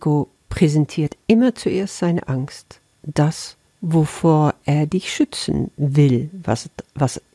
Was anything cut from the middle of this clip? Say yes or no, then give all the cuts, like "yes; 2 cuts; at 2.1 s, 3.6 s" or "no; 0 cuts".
no; 0 cuts